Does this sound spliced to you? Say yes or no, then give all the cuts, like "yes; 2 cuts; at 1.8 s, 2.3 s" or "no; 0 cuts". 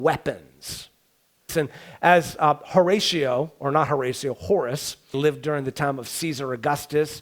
yes; 2 cuts; at 1.5 s, 5.1 s